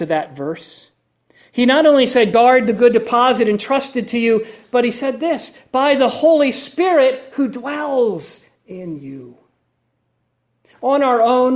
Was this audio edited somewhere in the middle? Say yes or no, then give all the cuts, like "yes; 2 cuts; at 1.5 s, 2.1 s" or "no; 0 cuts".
no; 0 cuts